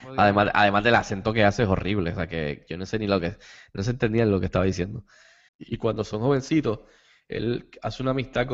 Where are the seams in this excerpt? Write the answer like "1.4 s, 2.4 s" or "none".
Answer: 5.5 s

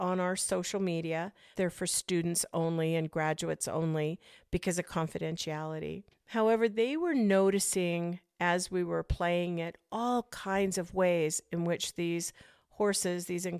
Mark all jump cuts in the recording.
1.5 s

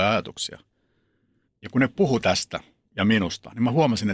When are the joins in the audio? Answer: 1.5 s

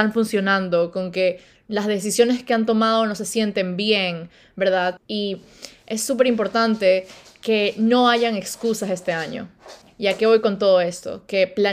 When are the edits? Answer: 5.0 s, 9.8 s

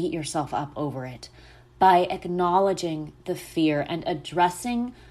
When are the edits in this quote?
none

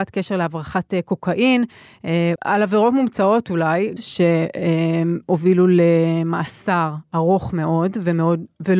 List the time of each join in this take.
2.4 s, 4.0 s

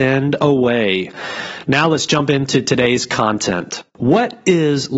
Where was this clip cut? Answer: 3.9 s

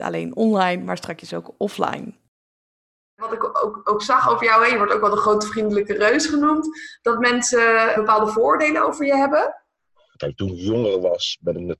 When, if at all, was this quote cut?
8.0 s, 10.1 s

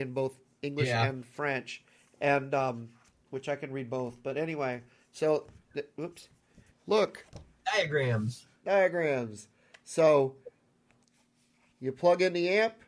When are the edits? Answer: 6.7 s

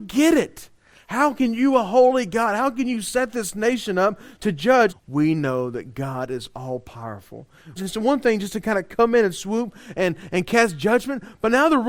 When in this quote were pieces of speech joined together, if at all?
4.9 s, 7.8 s

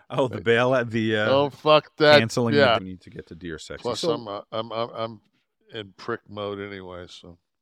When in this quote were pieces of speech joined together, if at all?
2.8 s

